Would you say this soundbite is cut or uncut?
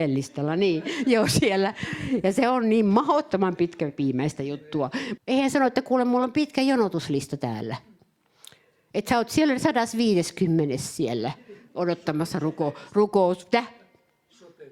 cut